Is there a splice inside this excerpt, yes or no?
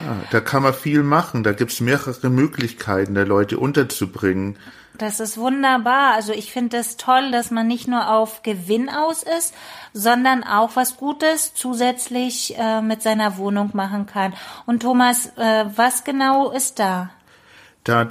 no